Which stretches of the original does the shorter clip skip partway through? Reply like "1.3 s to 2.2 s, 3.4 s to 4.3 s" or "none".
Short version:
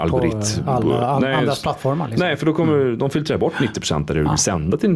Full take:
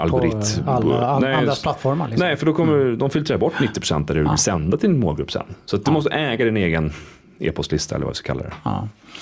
none